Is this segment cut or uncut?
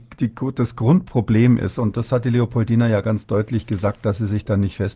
uncut